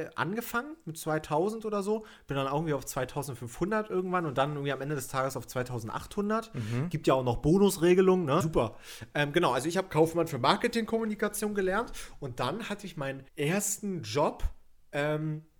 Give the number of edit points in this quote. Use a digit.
2